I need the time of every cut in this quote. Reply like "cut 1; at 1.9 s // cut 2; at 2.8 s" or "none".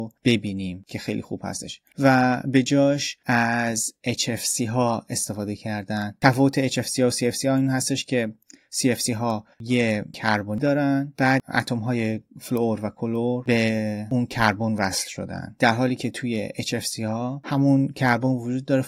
cut 1; at 9.5 s